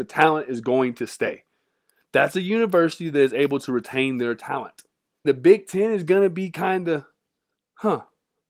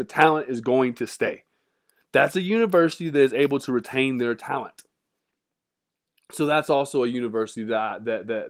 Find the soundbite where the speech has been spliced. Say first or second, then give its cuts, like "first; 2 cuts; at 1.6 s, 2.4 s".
first; 1 cut; at 5.2 s